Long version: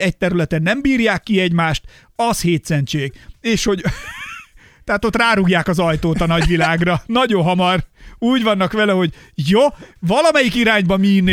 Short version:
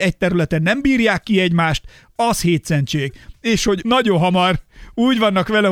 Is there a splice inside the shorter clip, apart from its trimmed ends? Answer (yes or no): yes